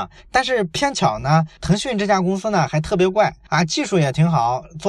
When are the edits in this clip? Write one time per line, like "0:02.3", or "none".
none